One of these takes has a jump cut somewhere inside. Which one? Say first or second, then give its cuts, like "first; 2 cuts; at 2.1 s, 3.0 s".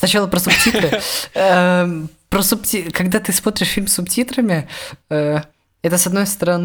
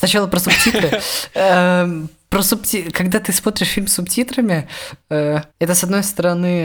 second; 1 cut; at 5.5 s